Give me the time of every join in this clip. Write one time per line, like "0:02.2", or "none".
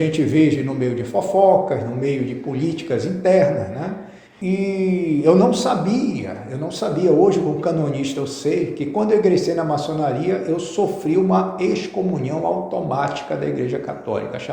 0:04.3